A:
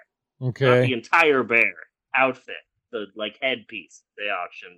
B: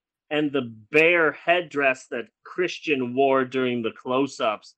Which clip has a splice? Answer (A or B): A